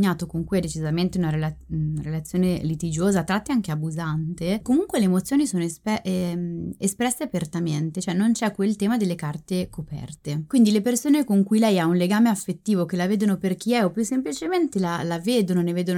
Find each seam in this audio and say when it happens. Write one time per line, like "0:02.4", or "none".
none